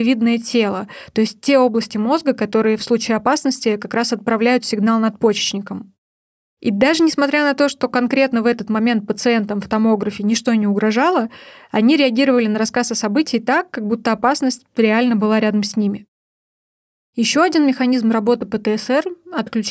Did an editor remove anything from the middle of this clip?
no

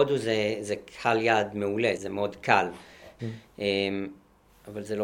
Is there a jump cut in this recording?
yes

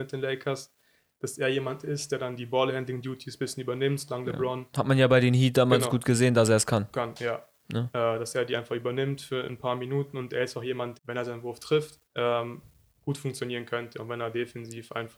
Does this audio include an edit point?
yes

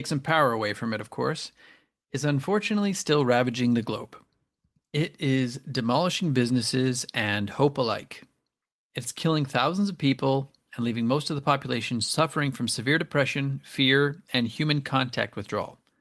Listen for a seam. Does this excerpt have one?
no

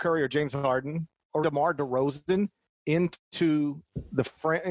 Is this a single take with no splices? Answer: no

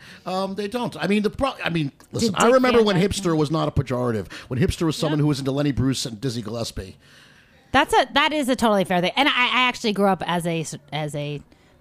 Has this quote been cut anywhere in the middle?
no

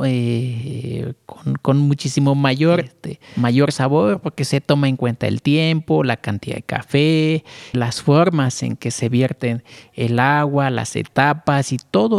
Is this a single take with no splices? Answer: no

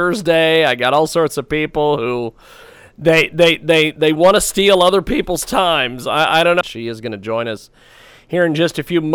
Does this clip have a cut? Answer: yes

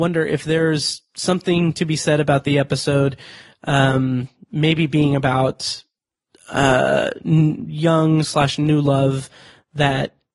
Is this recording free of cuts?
yes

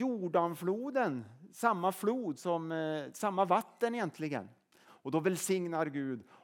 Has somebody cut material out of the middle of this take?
yes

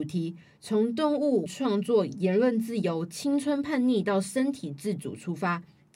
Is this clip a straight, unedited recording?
no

